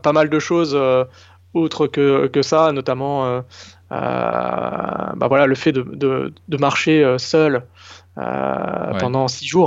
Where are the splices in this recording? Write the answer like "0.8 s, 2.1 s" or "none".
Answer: 5.7 s